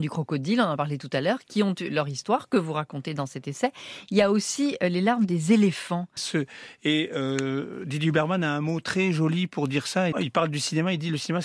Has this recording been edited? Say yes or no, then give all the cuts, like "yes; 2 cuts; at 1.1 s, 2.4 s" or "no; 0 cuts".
yes; 2 cuts; at 6.2 s, 10.1 s